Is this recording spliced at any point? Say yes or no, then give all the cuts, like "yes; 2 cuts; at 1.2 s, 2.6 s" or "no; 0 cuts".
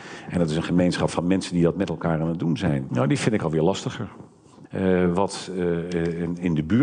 yes; 2 cuts; at 2.9 s, 4.6 s